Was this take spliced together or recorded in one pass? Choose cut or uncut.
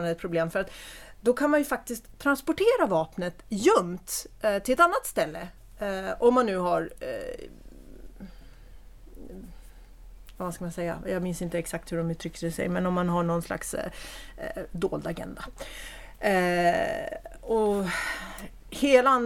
uncut